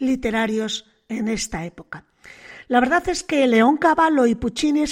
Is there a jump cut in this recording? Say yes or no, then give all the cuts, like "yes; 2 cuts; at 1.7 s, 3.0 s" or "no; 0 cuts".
no; 0 cuts